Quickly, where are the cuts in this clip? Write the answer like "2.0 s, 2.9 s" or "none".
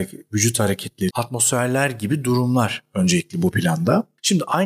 1.1 s